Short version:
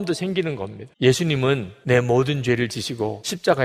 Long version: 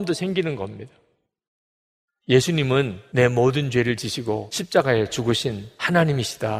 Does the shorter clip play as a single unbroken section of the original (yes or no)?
no